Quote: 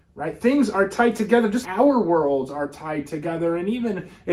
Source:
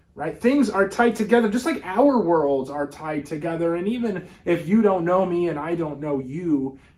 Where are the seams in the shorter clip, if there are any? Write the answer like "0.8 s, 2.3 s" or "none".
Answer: 1.6 s